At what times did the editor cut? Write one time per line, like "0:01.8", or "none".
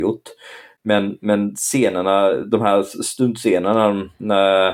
none